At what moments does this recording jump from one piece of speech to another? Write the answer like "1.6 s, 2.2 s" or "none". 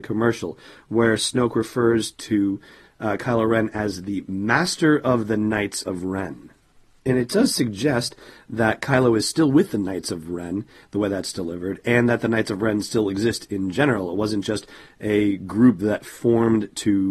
none